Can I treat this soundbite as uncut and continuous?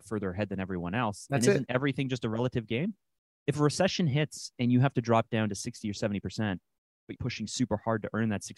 no; 2 cuts; at 3.3 s, 7.2 s

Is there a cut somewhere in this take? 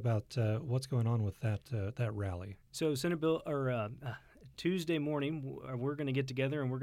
no; 0 cuts

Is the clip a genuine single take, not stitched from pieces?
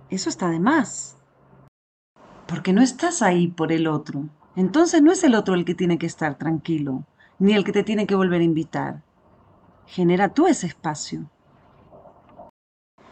no; 1 cut; at 4.4 s

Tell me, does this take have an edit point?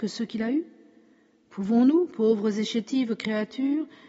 no; 0 cuts

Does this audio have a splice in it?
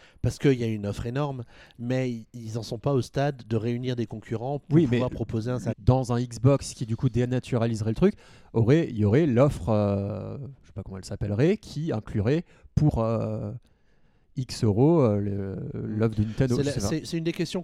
yes; 1 cut; at 5.7 s

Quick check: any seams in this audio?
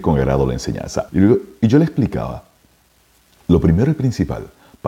yes; 1 cut; at 1.1 s

